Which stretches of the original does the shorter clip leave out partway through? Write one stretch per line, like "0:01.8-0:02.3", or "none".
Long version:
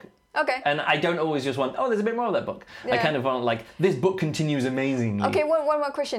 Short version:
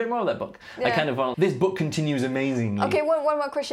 0:03.4-0:03.8

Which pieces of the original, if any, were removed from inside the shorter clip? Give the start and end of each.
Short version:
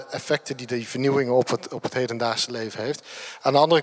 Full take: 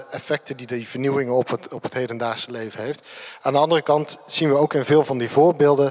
none

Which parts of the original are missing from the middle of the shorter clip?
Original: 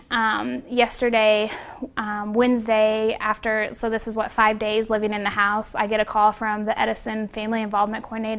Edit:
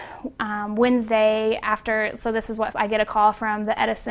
0:04.3-0:05.7

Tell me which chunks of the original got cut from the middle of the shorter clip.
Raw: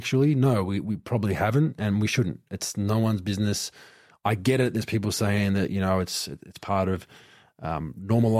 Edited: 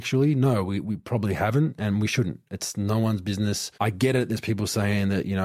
0:03.7-0:04.2

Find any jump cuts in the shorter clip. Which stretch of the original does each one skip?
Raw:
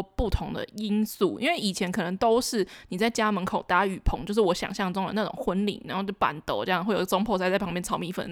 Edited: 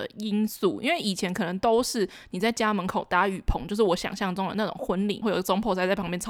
0:05.8-0:06.8

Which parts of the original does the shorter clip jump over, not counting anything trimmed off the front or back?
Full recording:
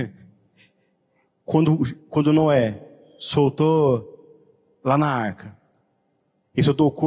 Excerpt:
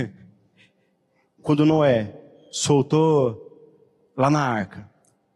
0:01.4-0:02.1

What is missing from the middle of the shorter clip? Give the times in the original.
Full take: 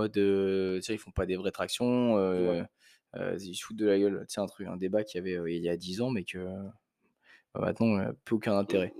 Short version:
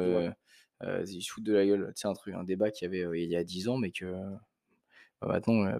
none

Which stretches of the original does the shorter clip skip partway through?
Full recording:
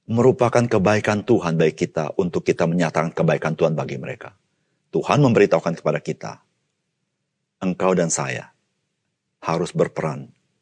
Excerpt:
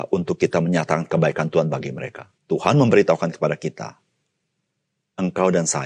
0:04.4-0:04.8

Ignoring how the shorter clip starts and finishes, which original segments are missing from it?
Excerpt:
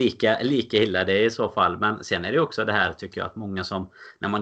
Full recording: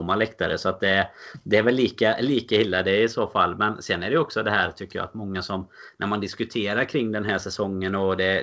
none

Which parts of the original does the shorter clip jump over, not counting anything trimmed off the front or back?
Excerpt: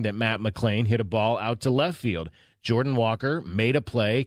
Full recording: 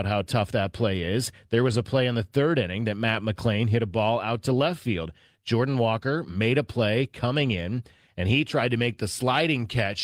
none

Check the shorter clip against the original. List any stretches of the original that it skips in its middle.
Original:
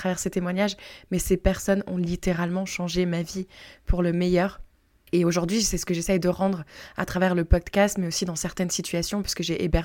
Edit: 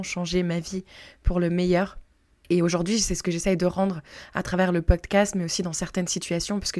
none

